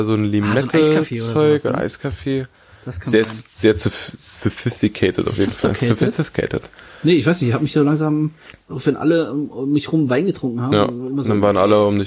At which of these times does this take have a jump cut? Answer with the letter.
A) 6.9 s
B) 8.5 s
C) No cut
B